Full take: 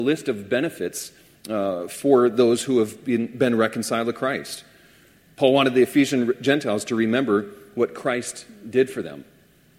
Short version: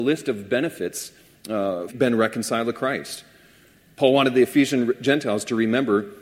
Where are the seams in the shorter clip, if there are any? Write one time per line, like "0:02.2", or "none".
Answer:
0:01.9